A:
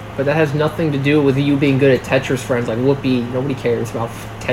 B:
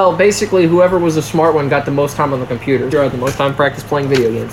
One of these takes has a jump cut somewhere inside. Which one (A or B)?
B